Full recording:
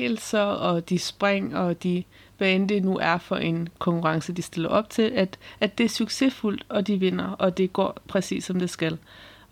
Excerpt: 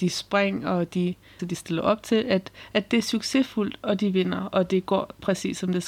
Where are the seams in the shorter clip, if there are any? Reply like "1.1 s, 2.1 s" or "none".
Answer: 1.4 s